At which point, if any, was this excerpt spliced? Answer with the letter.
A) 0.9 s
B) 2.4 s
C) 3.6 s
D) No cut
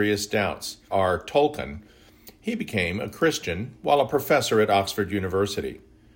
A